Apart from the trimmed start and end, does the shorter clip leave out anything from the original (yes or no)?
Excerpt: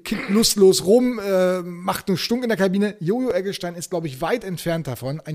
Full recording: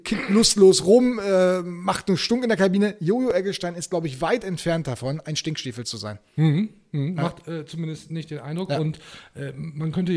no